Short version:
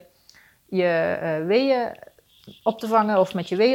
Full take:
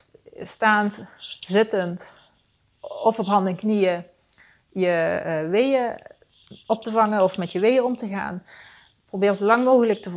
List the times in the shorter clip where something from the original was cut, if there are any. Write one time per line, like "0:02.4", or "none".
none